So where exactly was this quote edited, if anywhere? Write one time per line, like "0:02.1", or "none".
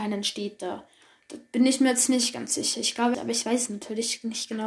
0:03.1

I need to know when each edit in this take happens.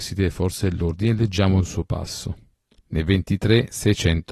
0:02.8

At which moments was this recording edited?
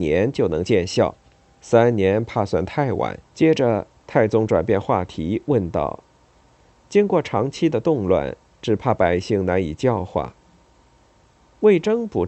0:03.2

